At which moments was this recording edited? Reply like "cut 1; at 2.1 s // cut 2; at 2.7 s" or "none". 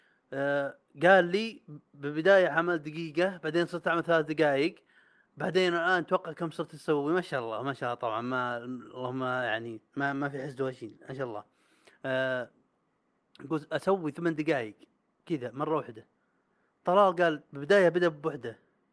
none